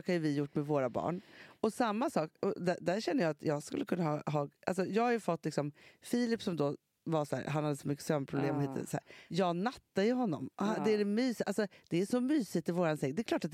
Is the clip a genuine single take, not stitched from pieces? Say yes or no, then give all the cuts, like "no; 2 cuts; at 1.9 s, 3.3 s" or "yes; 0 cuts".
yes; 0 cuts